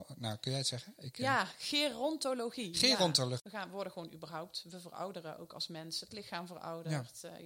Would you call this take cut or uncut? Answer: cut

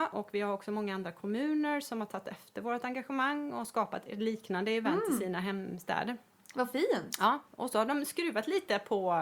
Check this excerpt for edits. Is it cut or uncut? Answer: uncut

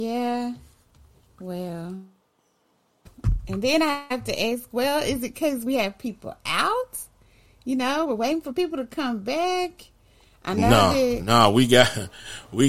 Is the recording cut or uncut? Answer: uncut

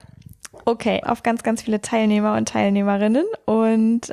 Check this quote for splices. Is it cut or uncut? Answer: cut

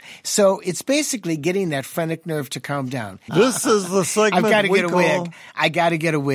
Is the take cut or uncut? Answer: cut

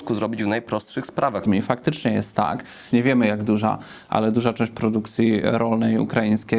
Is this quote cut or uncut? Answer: cut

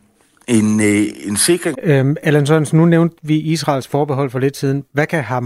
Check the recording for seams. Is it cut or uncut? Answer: cut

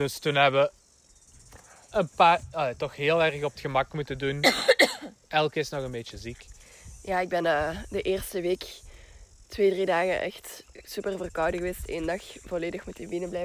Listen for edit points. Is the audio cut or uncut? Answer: uncut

